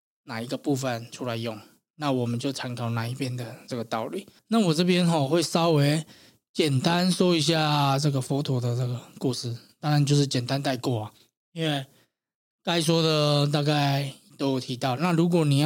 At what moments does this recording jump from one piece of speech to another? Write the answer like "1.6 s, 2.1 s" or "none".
4.4 s